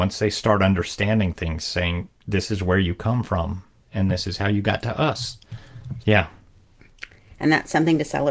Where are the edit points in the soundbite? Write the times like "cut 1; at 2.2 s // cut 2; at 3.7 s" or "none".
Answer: cut 1; at 6.0 s